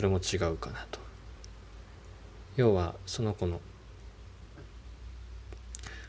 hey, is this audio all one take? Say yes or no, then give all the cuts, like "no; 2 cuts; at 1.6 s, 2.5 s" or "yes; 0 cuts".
yes; 0 cuts